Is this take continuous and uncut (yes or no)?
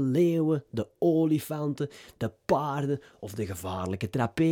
yes